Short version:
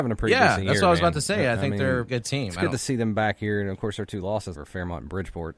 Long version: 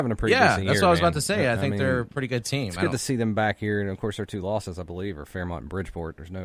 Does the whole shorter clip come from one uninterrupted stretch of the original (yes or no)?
no